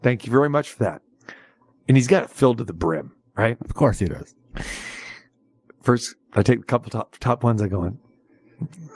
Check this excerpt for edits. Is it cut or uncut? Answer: uncut